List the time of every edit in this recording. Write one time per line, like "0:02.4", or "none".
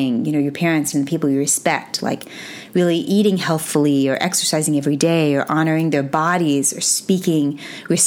0:00.9